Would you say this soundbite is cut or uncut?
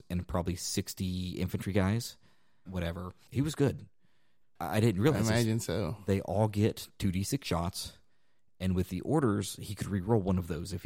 cut